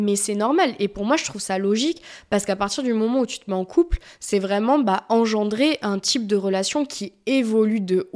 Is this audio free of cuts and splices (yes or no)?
yes